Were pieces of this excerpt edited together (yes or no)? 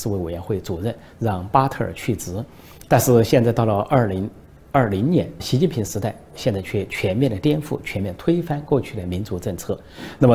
yes